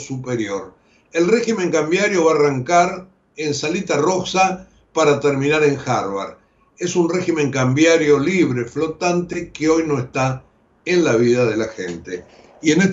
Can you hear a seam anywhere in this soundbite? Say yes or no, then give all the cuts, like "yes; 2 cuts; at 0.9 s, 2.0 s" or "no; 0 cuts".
no; 0 cuts